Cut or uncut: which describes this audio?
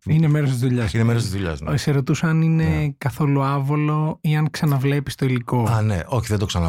uncut